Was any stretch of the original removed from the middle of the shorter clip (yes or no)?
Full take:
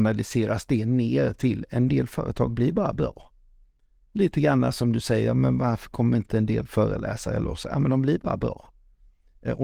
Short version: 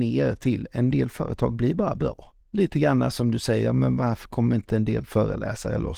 yes